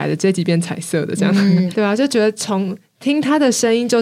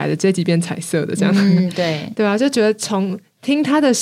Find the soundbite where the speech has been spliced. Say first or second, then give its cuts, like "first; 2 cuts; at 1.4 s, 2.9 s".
first; 1 cut; at 1.7 s